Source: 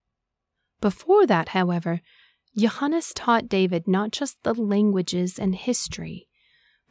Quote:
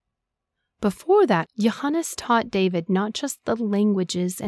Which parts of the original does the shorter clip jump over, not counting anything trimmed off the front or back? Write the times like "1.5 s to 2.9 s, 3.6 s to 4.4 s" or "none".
1.4 s to 2.4 s